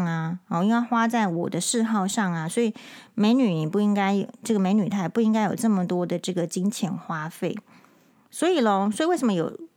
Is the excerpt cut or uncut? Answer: cut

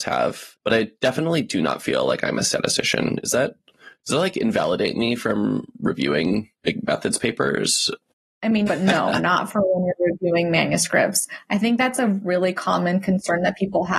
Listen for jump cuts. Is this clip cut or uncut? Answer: cut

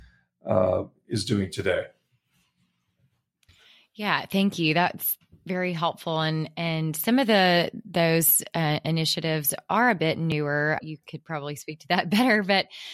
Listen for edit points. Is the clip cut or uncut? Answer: cut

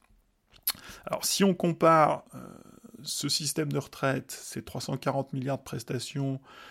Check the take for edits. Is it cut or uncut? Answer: uncut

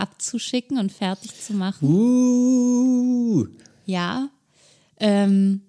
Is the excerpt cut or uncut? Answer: uncut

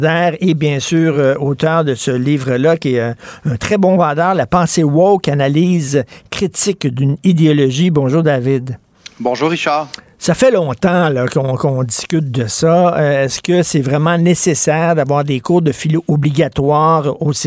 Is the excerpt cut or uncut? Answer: uncut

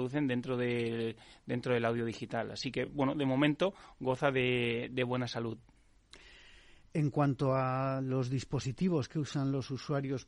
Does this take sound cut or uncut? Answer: uncut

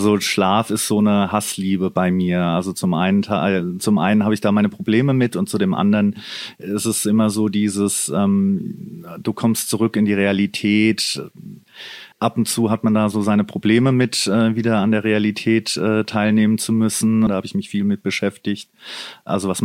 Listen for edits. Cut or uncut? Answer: cut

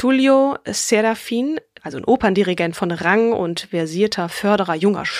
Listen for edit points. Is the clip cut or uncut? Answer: cut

